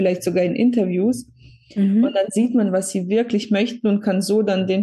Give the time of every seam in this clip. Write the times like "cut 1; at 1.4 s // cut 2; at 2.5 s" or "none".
none